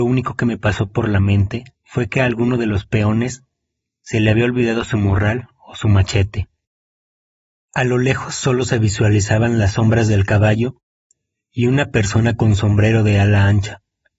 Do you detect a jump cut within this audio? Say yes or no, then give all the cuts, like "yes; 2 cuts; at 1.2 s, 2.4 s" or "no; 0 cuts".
yes; 1 cut; at 1.7 s